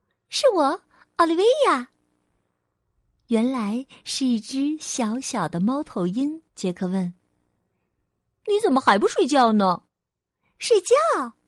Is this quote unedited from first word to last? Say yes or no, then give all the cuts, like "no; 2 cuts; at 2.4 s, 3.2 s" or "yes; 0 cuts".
no; 2 cuts; at 6.5 s, 9.8 s